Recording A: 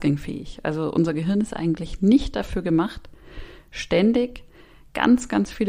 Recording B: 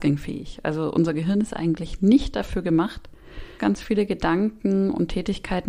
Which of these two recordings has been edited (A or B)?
B